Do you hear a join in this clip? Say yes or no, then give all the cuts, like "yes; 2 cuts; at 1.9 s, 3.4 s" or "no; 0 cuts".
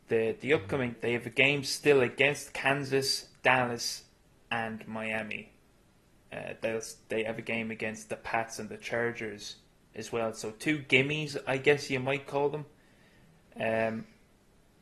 yes; 1 cut; at 0.9 s